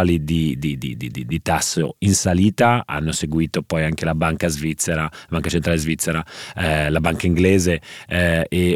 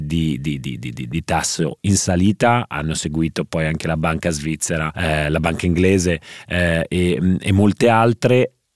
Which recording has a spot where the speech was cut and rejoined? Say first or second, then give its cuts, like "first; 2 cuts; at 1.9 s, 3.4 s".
second; 1 cut; at 4.9 s